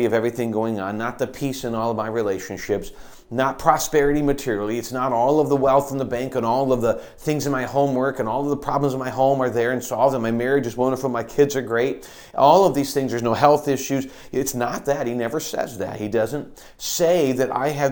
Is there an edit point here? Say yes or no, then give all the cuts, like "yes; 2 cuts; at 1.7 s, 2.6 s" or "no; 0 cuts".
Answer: no; 0 cuts